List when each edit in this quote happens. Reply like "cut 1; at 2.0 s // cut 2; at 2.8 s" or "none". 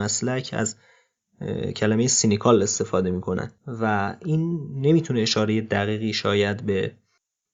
cut 1; at 3.6 s